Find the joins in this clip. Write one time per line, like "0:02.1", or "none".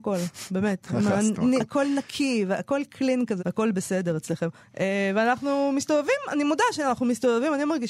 0:01.6
0:03.4
0:04.6